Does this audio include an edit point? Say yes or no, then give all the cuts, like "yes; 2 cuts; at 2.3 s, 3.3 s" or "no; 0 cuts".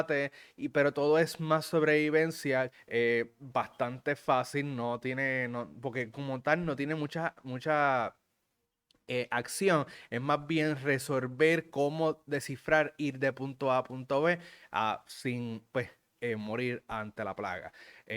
yes; 1 cut; at 2.7 s